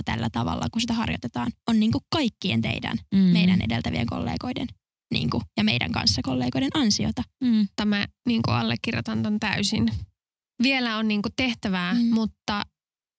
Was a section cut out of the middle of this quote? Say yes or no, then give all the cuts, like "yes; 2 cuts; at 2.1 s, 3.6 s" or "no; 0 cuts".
yes; 1 cut; at 7.8 s